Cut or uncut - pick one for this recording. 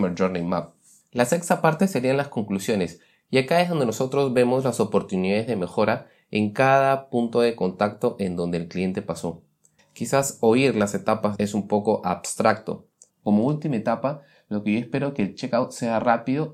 cut